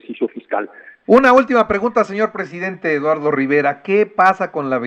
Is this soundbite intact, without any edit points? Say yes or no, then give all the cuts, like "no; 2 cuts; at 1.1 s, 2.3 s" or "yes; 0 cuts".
no; 1 cut; at 1.0 s